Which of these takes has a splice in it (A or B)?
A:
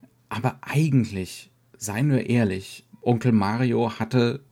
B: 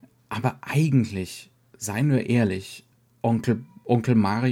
A